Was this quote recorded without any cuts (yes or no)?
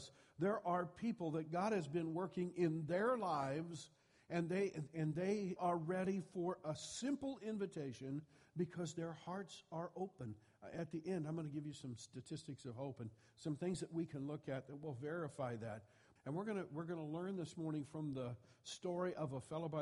no